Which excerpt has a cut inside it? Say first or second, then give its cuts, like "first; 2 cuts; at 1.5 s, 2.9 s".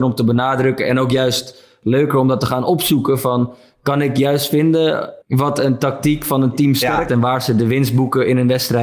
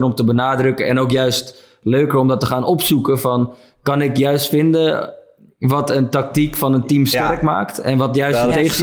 first; 2 cuts; at 5.2 s, 7.1 s